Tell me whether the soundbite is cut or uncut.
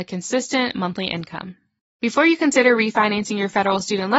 uncut